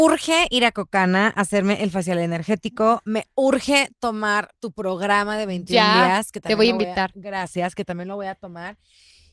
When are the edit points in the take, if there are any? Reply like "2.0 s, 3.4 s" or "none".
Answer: none